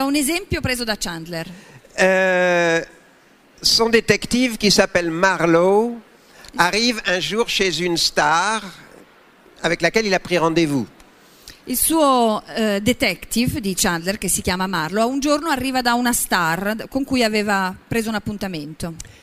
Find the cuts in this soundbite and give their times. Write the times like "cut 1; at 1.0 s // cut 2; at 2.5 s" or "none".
none

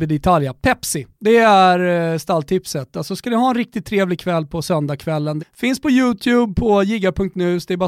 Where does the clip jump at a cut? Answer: cut 1; at 1.1 s // cut 2; at 5.4 s

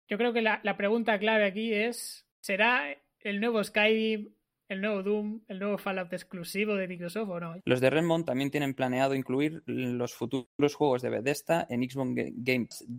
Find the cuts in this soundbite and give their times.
cut 1; at 7.6 s

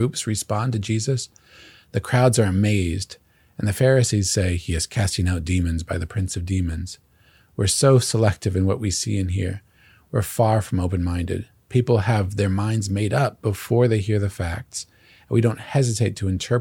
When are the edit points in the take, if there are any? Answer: none

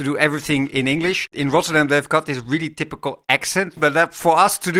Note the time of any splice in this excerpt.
cut 1; at 3.8 s

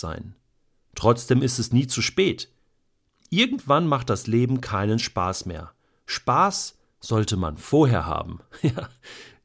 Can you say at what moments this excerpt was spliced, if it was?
none

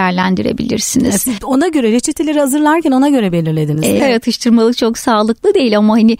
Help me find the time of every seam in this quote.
cut 1; at 4.0 s

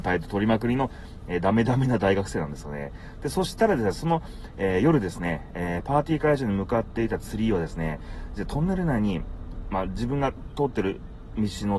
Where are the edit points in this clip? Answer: cut 1; at 3.2 s

